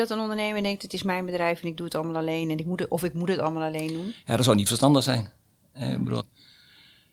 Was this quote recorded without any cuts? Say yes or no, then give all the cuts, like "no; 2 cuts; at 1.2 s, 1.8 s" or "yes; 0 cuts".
no; 1 cut; at 6.2 s